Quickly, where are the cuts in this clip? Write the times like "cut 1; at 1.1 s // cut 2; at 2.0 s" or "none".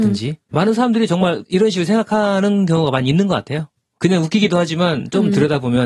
cut 1; at 3.9 s